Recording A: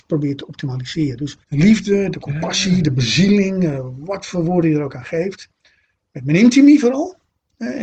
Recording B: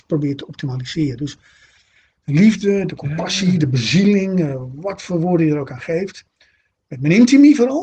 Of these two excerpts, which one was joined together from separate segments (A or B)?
A